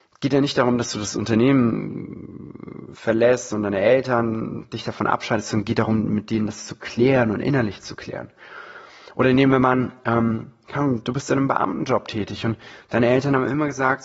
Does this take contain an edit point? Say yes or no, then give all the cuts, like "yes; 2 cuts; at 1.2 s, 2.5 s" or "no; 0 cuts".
no; 0 cuts